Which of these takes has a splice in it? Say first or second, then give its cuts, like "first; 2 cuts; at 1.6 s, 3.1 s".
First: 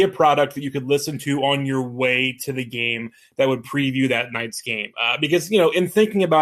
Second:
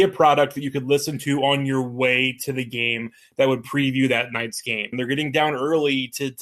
second; 1 cut; at 4.9 s